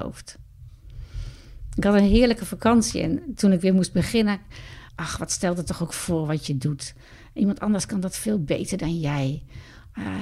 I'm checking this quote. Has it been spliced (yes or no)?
yes